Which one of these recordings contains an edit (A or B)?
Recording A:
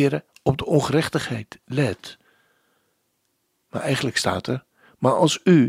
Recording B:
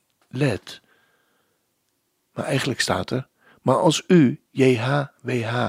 A